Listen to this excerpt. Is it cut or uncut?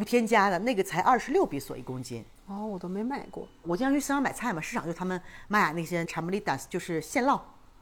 uncut